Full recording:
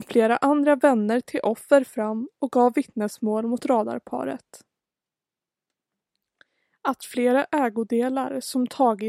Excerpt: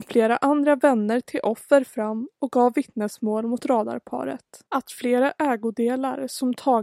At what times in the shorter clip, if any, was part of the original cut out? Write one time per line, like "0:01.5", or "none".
0:04.7